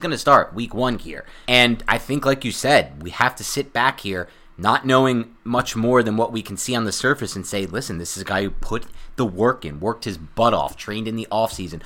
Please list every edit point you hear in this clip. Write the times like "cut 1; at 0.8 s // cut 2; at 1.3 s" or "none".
cut 1; at 1.4 s